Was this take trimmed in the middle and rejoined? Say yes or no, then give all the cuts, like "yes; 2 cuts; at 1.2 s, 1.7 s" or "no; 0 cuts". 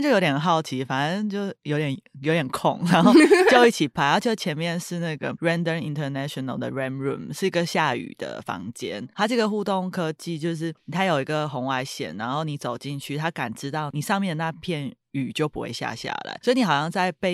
no; 0 cuts